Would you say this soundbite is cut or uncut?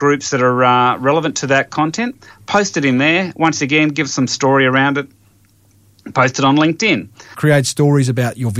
cut